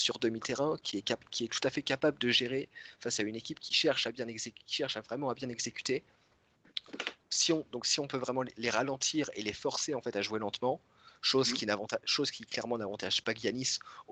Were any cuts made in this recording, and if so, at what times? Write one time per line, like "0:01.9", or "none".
none